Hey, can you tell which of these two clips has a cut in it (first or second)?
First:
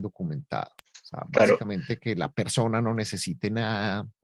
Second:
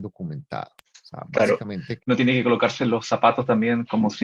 second